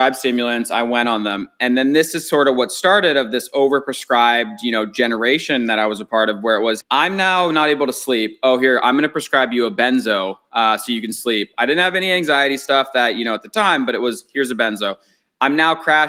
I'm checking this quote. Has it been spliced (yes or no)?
yes